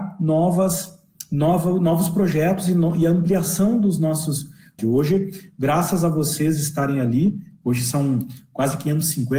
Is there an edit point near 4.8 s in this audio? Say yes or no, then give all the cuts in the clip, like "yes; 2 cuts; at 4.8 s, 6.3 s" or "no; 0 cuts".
yes; 1 cut; at 4.8 s